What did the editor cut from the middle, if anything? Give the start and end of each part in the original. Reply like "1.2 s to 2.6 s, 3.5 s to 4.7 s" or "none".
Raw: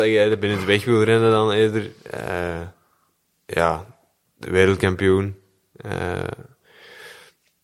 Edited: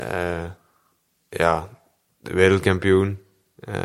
none